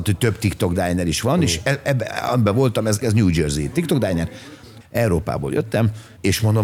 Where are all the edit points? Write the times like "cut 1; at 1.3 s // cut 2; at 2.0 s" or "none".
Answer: cut 1; at 3.0 s // cut 2; at 4.8 s